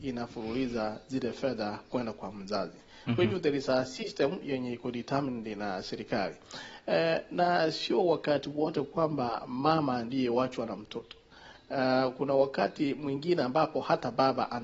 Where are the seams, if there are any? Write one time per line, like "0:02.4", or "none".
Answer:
none